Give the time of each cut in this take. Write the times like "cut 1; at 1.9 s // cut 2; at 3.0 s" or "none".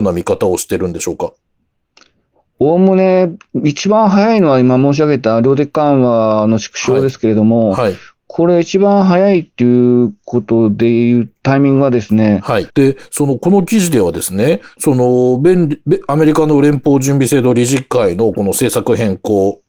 cut 1; at 12.7 s